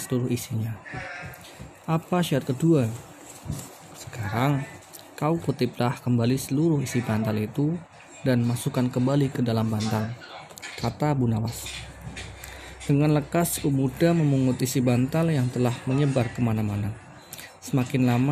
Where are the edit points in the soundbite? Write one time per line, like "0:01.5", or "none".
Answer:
none